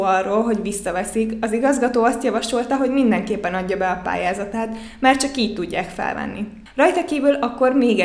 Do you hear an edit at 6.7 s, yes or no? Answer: no